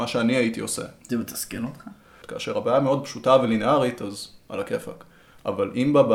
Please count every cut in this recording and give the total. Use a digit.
1